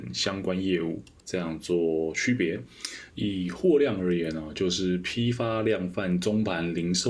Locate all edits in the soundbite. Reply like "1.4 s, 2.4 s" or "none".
3.1 s